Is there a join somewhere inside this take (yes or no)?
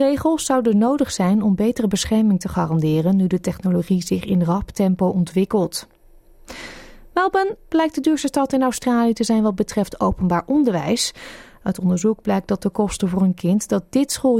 no